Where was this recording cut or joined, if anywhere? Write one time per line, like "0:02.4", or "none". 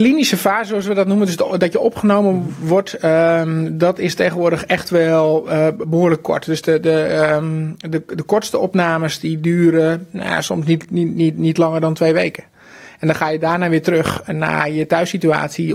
none